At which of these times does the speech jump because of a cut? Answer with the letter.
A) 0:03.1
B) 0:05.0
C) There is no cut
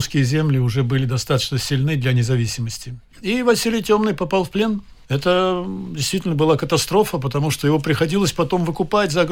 A